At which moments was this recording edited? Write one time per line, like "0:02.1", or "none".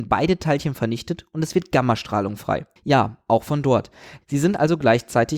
0:02.8
0:04.2